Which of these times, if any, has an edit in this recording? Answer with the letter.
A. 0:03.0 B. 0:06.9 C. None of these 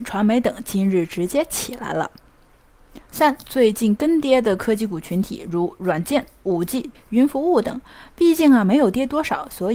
B